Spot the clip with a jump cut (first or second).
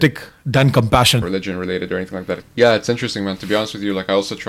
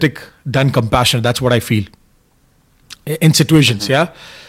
first